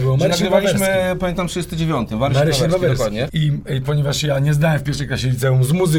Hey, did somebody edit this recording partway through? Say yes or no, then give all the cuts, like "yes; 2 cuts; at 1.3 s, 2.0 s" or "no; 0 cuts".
yes; 1 cut; at 3.3 s